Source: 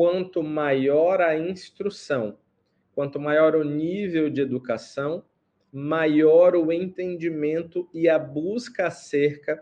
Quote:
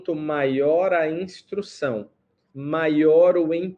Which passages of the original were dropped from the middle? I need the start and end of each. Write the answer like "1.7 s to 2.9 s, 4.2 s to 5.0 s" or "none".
2.7 s to 5.6 s